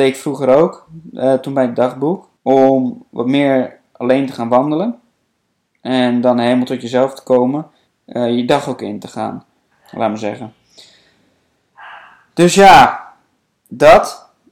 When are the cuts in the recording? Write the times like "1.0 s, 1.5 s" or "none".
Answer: 2.4 s, 7.9 s, 9.7 s

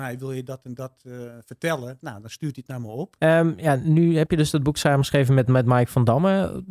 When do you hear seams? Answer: 2.0 s, 3.2 s

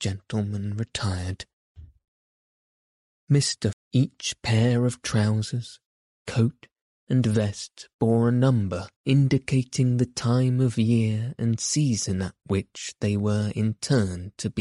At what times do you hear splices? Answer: 3.7 s, 9.0 s

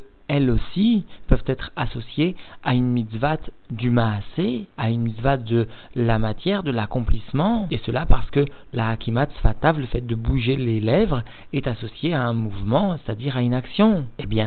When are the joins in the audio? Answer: none

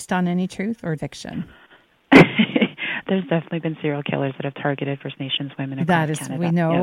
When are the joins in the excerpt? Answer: 1.0 s

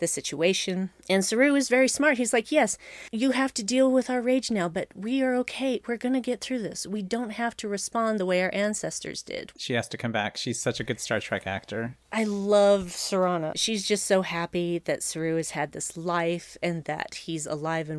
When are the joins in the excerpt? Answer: 9.5 s

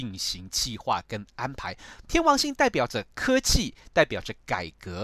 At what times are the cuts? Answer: 2.0 s

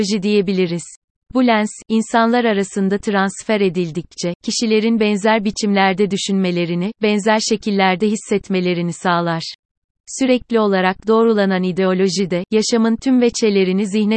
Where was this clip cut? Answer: 10.0 s

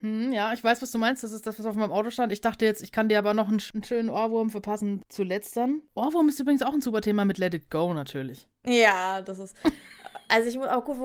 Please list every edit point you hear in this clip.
none

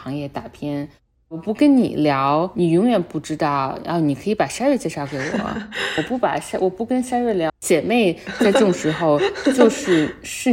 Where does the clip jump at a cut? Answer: 7.5 s

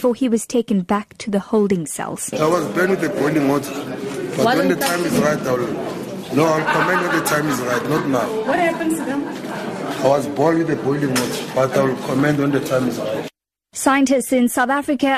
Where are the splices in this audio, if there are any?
none

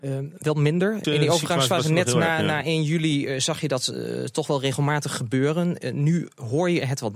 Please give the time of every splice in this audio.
1.0 s

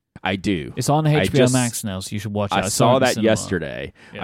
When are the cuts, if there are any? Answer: none

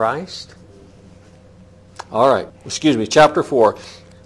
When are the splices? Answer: 2.5 s

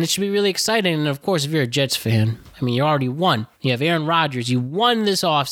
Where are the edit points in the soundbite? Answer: 3.5 s

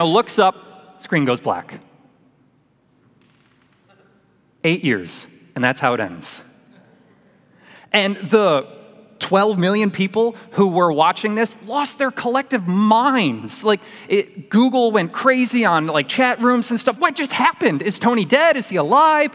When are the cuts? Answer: 17.0 s

